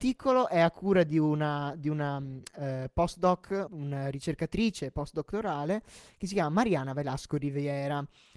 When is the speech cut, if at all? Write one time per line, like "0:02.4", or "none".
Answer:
0:03.7